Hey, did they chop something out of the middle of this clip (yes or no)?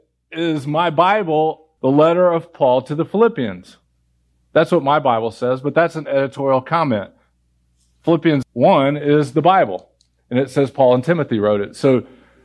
yes